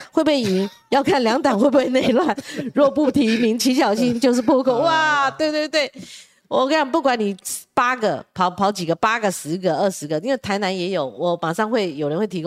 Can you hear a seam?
no; 0 cuts

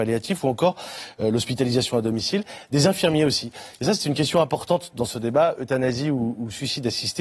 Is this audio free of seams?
yes; 0 cuts

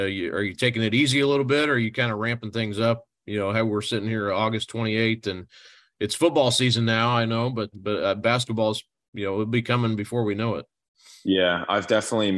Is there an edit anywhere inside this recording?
yes; 1 cut; at 7.7 s

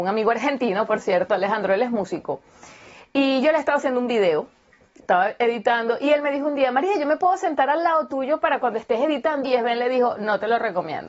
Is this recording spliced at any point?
yes; 1 cut; at 9.4 s

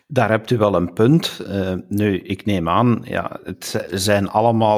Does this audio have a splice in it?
no; 0 cuts

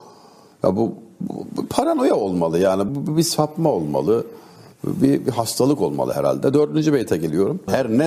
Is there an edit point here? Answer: yes; 1 cut; at 2.9 s

